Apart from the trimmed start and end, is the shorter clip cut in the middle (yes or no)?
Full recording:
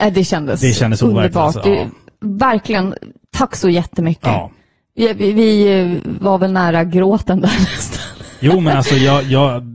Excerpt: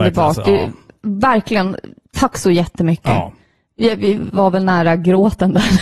yes